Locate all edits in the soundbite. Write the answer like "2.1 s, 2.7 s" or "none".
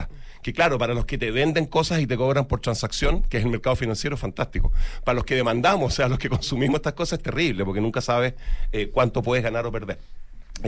none